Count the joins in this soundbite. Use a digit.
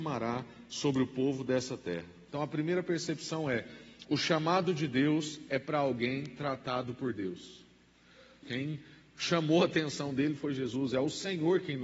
2